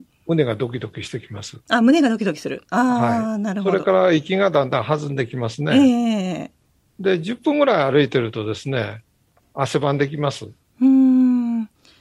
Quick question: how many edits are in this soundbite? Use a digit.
0